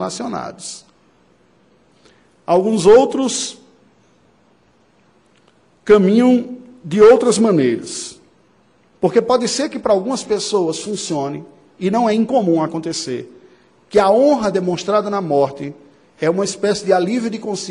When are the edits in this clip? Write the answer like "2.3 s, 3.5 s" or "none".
8.9 s